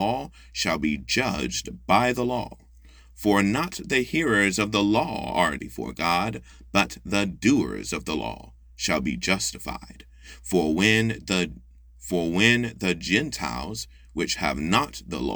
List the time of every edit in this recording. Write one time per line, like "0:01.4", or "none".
0:05.6